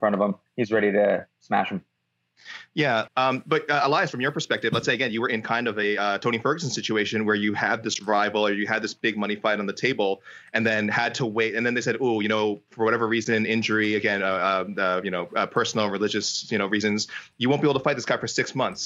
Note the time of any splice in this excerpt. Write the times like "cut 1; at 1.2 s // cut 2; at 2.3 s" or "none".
cut 1; at 3.1 s